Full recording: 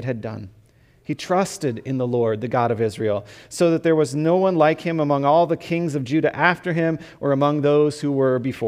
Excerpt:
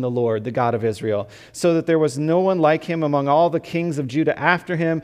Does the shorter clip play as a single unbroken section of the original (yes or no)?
yes